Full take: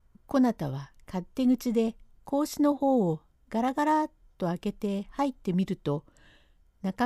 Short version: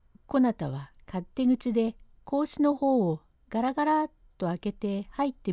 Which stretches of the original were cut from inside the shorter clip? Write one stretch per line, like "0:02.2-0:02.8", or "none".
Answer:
none